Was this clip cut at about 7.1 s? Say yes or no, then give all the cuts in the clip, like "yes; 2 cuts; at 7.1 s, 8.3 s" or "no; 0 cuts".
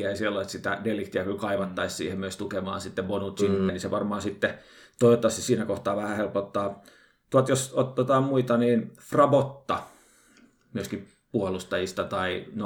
no; 1 cut; at 3.7 s